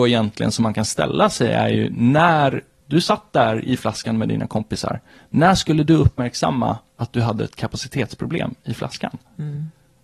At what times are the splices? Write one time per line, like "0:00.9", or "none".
0:02.8